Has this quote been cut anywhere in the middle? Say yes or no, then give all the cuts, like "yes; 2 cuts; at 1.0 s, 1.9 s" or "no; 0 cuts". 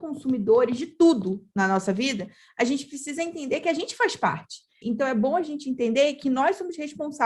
yes; 1 cut; at 4.8 s